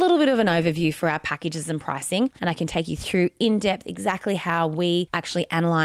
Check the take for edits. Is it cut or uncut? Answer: cut